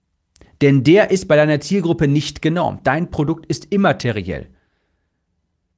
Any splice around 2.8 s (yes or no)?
no